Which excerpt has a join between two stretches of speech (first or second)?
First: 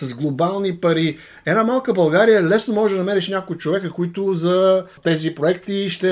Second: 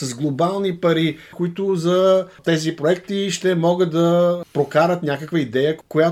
second